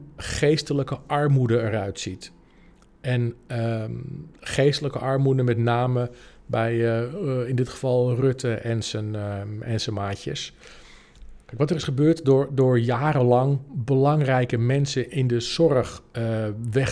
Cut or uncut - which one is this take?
uncut